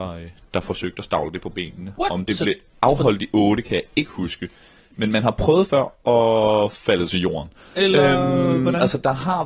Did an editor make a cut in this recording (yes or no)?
yes